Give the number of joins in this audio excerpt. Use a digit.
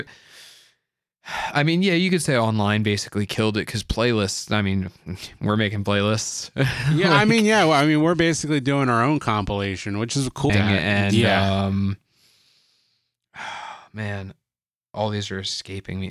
1